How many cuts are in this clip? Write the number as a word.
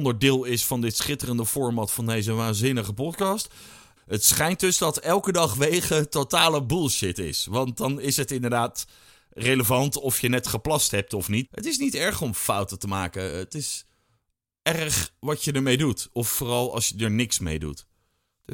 two